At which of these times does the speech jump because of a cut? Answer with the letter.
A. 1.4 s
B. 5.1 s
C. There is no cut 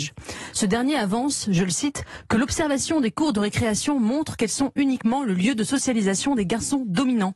C